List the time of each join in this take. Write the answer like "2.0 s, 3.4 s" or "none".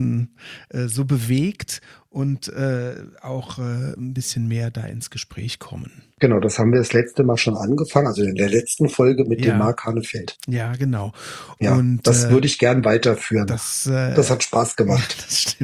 6.1 s